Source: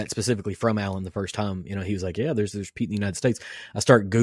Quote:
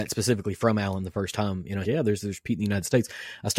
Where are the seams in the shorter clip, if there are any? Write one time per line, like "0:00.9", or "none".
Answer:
0:01.8